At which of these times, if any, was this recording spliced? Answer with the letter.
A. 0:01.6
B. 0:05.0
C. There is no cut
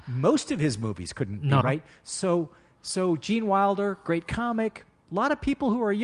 A